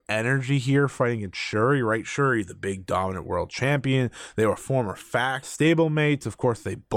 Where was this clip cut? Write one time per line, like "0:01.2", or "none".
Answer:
0:05.4